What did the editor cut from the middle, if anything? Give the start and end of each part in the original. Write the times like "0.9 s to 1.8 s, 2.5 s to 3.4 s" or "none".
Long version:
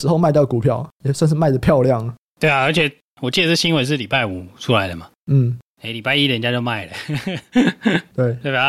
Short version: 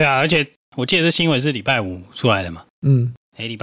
none